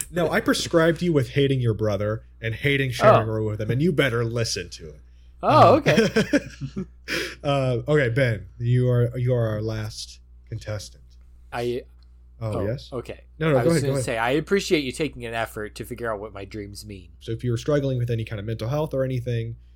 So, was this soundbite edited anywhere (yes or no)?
yes